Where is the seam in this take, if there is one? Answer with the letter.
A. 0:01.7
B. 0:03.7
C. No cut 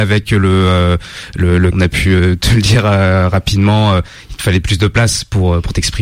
A